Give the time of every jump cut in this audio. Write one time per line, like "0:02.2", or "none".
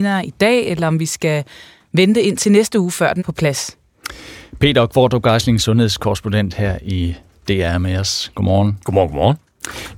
0:03.2